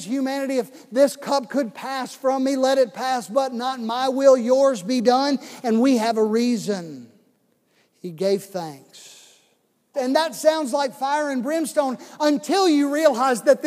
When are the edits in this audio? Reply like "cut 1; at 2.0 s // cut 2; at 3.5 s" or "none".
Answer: cut 1; at 9.9 s